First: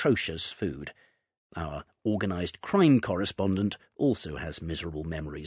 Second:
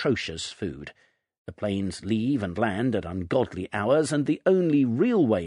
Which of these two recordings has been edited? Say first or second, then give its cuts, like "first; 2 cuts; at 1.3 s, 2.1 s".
first; 1 cut; at 1.4 s